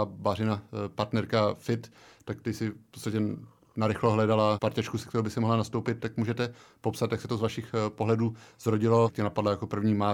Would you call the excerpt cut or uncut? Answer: cut